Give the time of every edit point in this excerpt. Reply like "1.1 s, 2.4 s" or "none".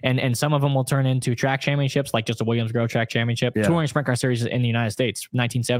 3.5 s